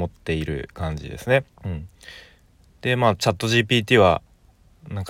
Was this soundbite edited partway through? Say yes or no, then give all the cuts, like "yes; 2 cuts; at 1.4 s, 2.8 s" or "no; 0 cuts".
yes; 1 cut; at 1.5 s